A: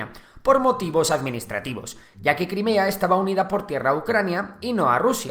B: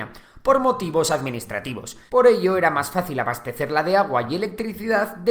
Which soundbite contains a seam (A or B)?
B